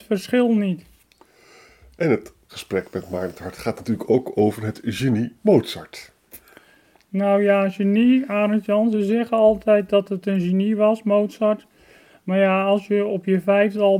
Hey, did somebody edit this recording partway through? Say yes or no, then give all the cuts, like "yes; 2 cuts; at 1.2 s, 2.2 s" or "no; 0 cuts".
no; 0 cuts